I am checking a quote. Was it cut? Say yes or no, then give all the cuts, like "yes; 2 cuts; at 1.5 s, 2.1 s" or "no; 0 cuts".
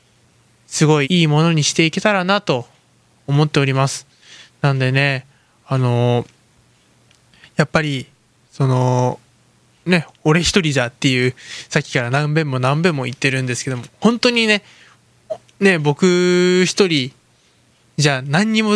yes; 1 cut; at 1.0 s